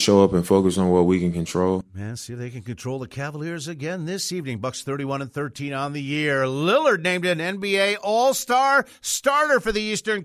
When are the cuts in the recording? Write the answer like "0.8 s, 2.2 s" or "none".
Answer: none